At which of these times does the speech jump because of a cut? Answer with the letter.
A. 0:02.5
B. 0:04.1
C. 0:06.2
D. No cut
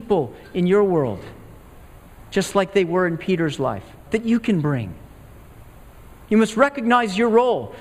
B